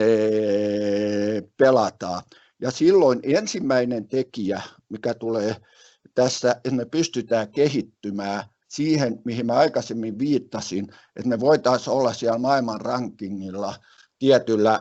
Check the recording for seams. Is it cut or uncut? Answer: uncut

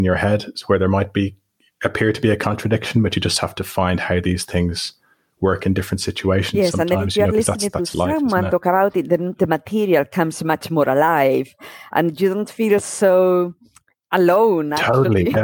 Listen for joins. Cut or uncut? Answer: uncut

